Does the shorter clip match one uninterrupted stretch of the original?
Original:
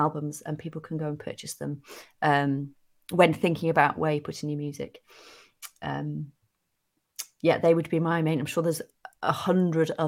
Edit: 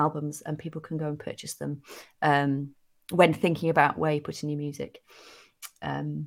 yes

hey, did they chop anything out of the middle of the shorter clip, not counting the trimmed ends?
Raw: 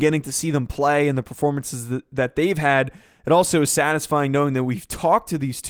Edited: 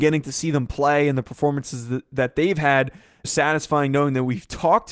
yes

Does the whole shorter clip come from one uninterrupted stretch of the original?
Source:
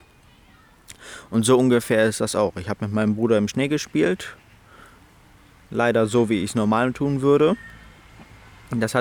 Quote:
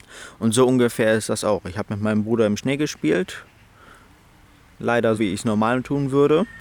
no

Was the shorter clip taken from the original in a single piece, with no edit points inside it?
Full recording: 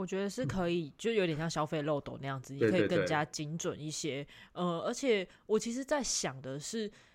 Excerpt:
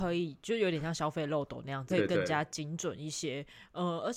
no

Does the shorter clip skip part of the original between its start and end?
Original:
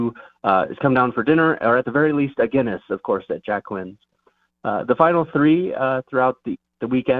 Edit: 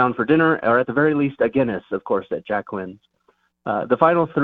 no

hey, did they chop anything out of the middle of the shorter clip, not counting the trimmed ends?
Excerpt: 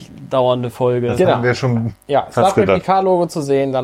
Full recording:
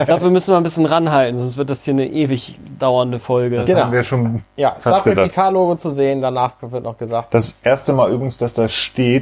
no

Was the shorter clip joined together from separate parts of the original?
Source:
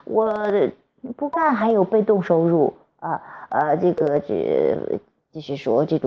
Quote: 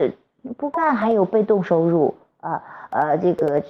no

